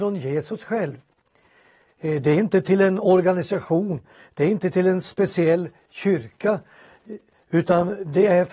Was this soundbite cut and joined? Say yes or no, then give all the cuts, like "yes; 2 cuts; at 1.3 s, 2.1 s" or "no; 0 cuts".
no; 0 cuts